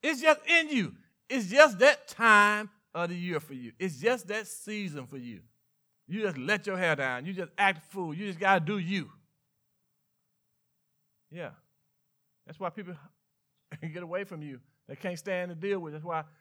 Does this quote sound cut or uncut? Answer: uncut